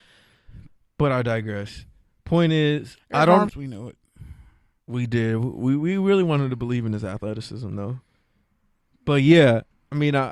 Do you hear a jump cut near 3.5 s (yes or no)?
yes